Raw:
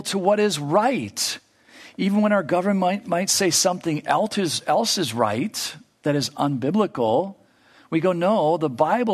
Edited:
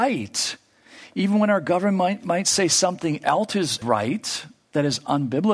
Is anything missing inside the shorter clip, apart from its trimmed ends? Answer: yes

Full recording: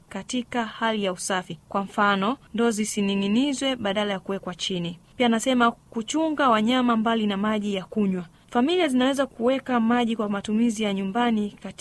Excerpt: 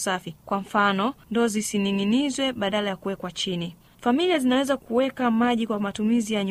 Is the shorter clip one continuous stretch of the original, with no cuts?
no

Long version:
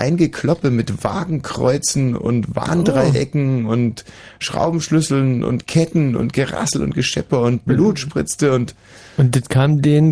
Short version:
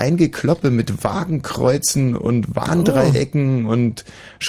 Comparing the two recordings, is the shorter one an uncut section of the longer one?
yes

